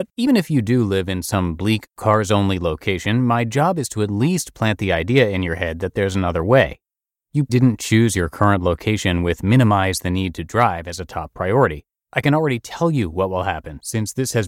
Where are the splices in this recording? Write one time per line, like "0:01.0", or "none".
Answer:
0:07.5
0:12.0